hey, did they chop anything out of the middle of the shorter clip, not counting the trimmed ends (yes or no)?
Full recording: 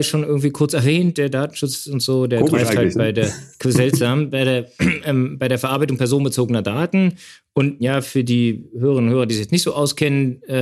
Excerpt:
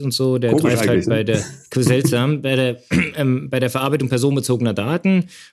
no